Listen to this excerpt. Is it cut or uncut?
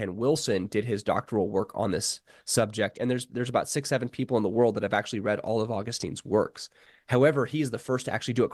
cut